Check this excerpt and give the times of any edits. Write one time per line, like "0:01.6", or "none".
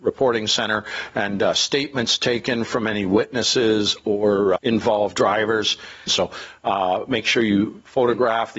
0:04.6
0:06.1